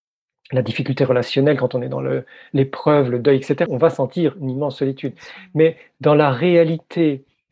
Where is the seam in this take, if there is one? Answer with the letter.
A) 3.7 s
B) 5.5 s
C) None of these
A